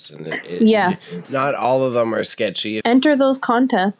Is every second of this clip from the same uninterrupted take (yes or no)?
no